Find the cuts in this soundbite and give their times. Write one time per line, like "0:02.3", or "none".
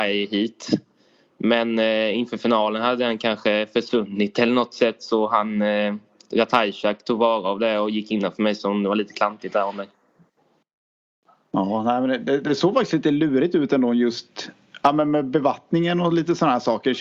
none